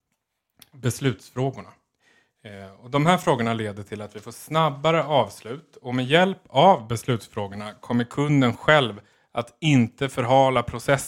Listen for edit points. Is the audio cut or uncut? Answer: uncut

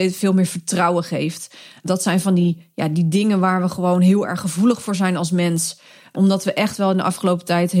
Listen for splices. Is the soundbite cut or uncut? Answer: uncut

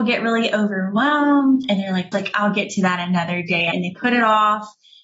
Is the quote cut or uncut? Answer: cut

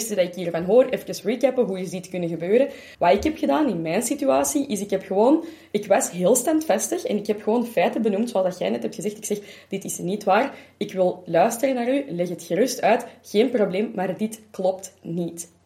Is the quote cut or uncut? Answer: cut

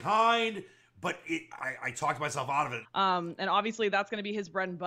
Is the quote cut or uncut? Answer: cut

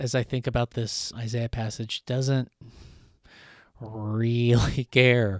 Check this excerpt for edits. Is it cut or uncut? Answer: cut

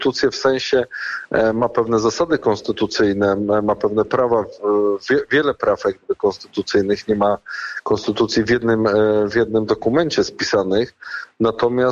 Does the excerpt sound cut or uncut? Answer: uncut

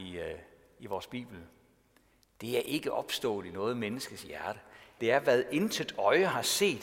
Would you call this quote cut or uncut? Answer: cut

